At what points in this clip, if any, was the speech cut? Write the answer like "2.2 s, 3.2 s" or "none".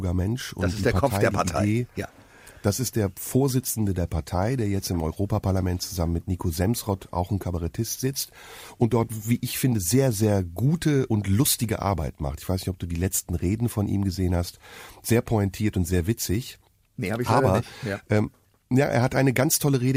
none